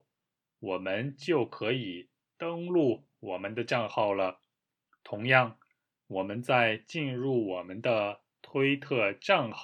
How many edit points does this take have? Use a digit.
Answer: 1